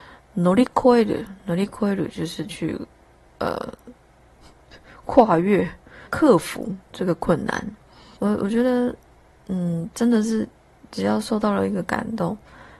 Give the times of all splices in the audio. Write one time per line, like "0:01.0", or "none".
0:06.1
0:08.2